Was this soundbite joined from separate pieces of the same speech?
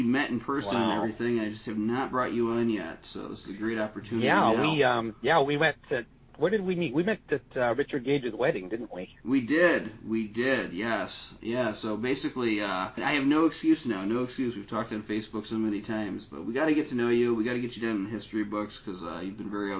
no; 0 cuts

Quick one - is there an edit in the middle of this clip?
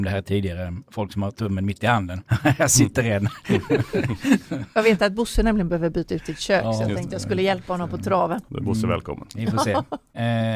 no; 0 cuts

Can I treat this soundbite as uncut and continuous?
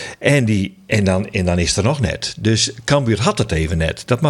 yes; 0 cuts

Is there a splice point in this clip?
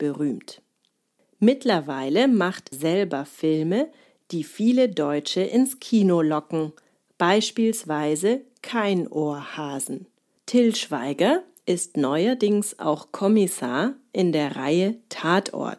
yes; 2 cuts; at 2.7 s, 10.4 s

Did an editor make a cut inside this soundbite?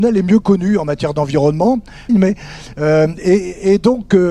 yes; 1 cut; at 2.1 s

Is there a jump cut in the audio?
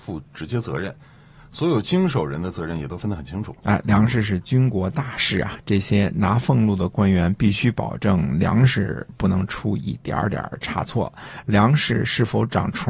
no; 0 cuts

